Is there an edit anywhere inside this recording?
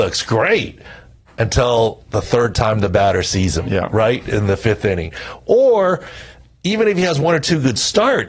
no; 0 cuts

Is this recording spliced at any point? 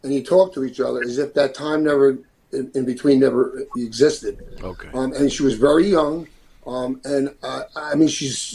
no; 0 cuts

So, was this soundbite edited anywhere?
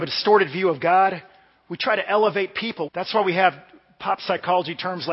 yes; 1 cut; at 2.9 s

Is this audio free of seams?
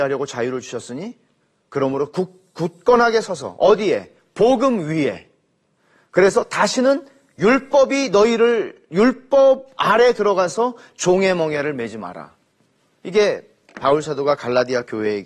yes; 0 cuts

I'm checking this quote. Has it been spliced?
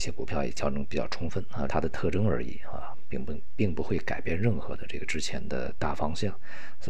yes; 1 cut; at 1.7 s

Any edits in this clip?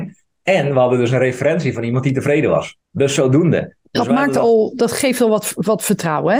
yes; 1 cut; at 2.8 s

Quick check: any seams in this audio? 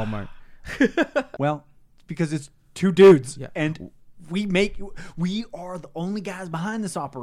yes; 1 cut; at 1.4 s

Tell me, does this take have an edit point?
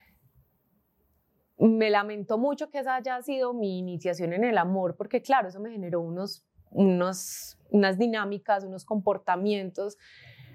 no; 0 cuts

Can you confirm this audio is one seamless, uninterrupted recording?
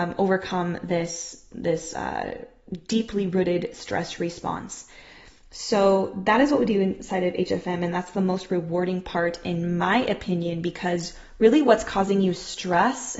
yes; 0 cuts

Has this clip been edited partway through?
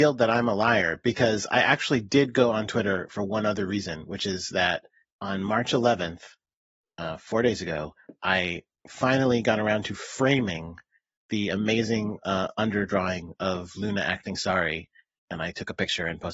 no; 0 cuts

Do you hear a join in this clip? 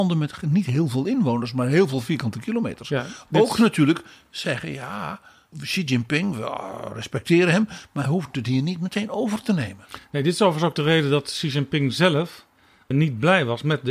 no; 0 cuts

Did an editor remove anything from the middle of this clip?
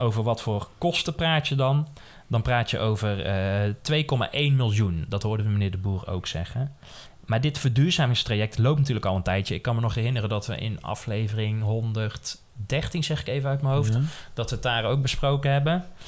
no; 0 cuts

